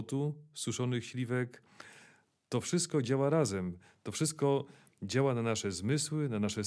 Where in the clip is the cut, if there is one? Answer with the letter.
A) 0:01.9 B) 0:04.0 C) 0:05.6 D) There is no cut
D